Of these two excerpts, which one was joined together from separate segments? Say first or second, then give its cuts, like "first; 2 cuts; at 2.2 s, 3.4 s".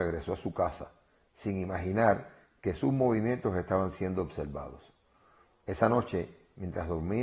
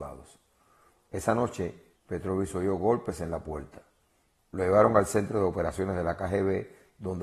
second; 2 cuts; at 2.0 s, 4.4 s